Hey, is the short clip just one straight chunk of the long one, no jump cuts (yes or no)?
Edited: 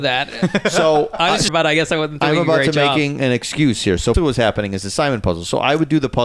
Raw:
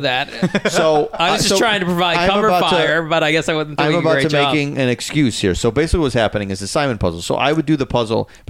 no